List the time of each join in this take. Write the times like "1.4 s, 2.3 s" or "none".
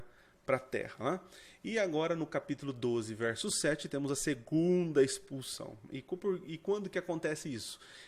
none